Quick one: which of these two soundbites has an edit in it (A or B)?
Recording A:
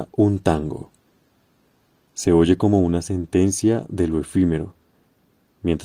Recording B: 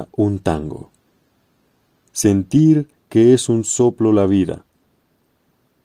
A